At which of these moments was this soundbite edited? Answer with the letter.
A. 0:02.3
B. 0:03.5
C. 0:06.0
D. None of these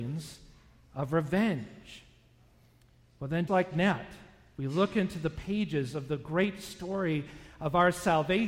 B